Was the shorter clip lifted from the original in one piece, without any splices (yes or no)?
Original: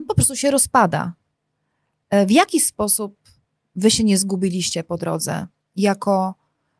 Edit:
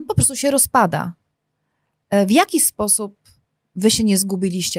yes